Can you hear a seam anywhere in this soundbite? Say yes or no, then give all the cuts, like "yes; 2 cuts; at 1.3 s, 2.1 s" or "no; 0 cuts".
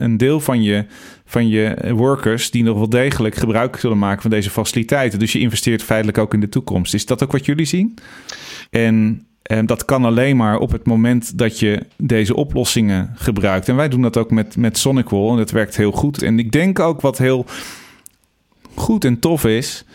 yes; 2 cuts; at 8.7 s, 16.2 s